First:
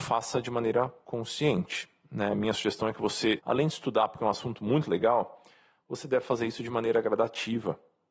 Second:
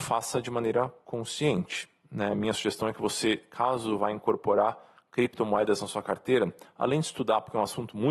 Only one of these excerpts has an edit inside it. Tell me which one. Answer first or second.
first